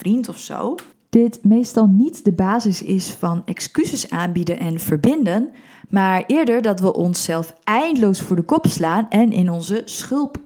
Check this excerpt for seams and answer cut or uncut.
uncut